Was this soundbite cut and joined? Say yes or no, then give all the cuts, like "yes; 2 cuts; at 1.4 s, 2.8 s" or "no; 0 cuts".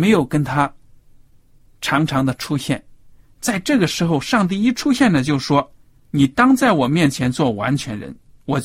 no; 0 cuts